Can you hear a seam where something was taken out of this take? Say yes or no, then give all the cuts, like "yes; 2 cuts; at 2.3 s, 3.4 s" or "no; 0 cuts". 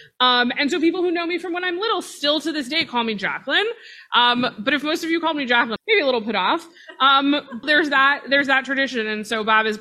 yes; 2 cuts; at 5.8 s, 7.6 s